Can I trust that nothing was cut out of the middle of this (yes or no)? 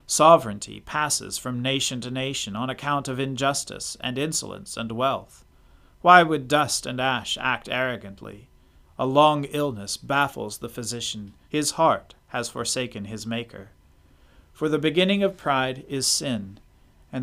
no